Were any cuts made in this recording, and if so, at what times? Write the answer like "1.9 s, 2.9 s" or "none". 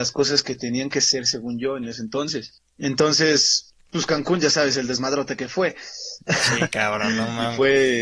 none